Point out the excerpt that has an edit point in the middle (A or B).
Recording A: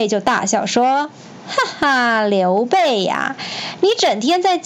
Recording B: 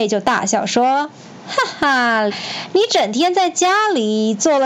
B